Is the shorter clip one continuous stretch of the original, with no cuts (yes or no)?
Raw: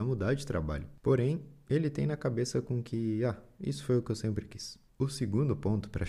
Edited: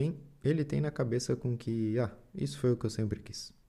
yes